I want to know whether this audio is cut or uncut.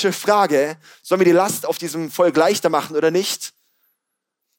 uncut